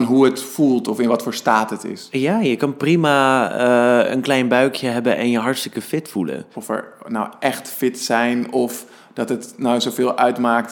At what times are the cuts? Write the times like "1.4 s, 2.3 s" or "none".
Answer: 6.5 s